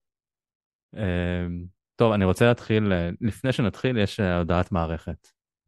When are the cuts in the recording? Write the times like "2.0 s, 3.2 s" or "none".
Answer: none